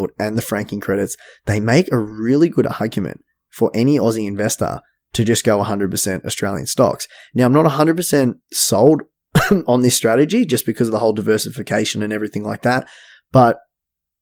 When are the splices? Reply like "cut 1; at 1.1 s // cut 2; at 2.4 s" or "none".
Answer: cut 1; at 8.4 s